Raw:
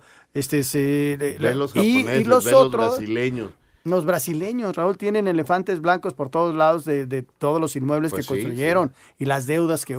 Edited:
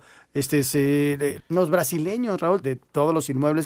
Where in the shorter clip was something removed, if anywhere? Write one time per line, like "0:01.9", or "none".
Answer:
0:01.4
0:02.6